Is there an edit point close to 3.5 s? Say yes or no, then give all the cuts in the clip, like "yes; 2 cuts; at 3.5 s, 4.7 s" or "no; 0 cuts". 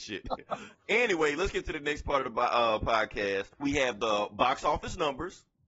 yes; 1 cut; at 3.5 s